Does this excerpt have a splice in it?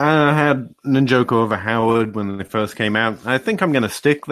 no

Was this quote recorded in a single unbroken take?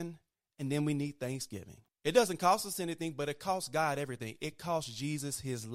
no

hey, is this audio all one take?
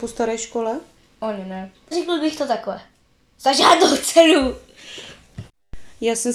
no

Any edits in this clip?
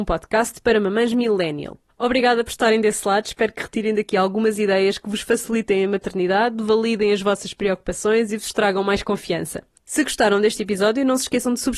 yes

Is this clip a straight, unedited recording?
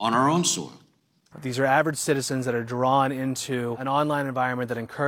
no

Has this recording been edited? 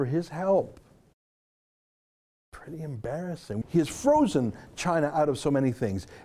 yes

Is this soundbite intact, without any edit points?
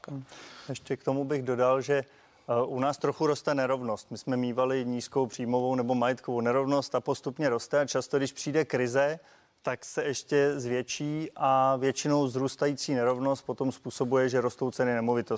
yes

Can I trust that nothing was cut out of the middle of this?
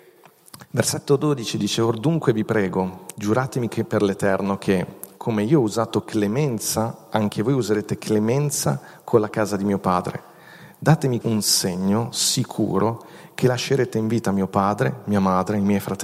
no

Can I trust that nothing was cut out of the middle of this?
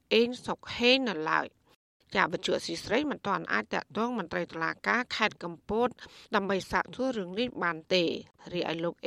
yes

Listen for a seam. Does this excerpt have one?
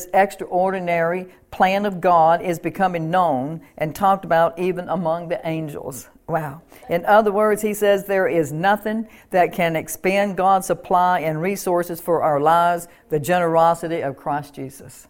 no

